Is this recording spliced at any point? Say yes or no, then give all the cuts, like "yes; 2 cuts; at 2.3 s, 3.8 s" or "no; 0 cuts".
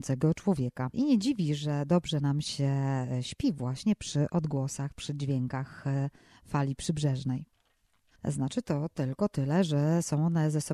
yes; 2 cuts; at 0.9 s, 8.2 s